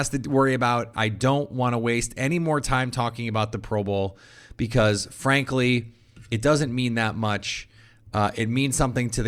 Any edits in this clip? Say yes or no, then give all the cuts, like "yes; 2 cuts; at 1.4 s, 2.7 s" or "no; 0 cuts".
yes; 1 cut; at 0.9 s